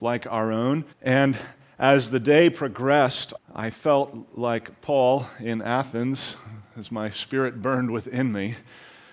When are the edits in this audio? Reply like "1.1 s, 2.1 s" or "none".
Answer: 0.9 s, 3.4 s